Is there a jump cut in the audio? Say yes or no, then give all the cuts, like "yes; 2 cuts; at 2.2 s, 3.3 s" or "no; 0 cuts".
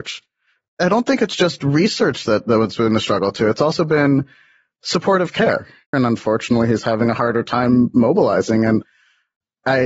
yes; 1 cut; at 5.9 s